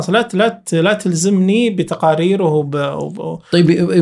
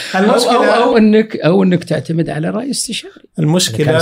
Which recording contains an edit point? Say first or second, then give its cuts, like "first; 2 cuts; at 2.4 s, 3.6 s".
second; 1 cut; at 0.9 s